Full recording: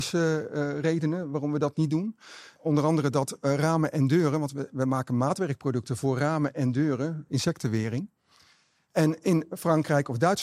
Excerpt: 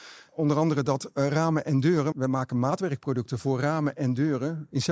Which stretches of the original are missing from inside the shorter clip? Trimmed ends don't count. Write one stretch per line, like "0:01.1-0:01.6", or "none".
0:04.4-0:04.7